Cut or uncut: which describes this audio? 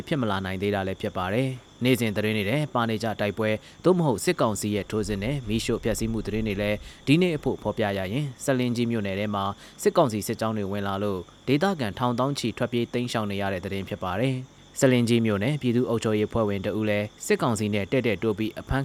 cut